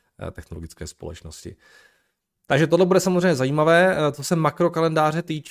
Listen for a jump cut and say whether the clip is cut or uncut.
uncut